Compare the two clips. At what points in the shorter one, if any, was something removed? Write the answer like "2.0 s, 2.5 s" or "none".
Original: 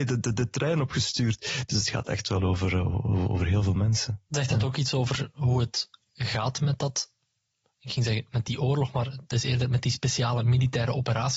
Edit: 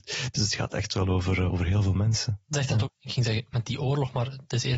1.5 s, 2.8 s